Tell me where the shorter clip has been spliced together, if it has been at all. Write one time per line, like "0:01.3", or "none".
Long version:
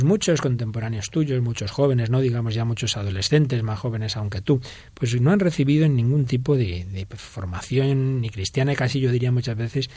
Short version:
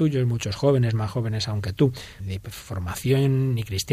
0:00.9
0:02.2